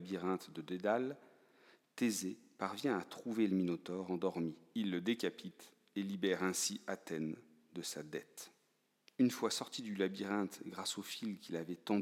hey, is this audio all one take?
yes; 0 cuts

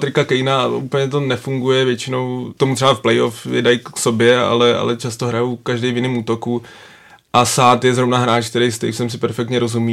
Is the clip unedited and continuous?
yes; 0 cuts

